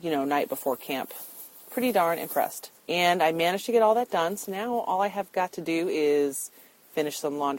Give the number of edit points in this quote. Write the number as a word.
two